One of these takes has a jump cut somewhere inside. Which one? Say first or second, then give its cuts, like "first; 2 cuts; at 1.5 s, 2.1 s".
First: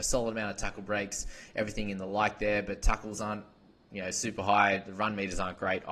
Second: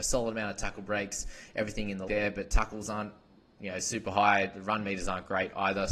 second; 1 cut; at 2.1 s